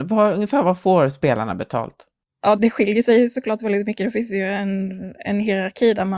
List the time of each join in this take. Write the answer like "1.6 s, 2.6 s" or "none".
2.6 s